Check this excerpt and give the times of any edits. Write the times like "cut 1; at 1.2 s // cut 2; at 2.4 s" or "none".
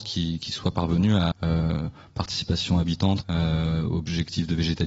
cut 1; at 1.3 s // cut 2; at 3.2 s